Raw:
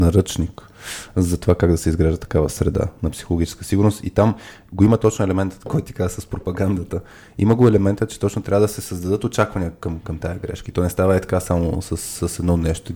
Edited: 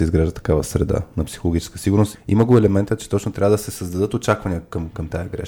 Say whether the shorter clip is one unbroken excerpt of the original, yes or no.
no